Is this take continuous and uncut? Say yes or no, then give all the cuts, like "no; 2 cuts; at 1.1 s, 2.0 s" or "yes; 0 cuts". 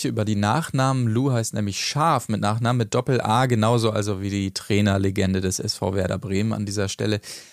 yes; 0 cuts